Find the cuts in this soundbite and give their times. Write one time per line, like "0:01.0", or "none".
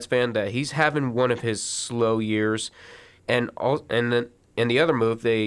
0:03.2